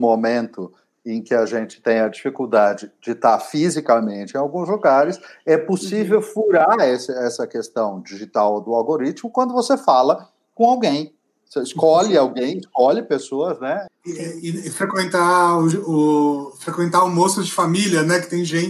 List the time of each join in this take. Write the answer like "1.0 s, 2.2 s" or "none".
13.9 s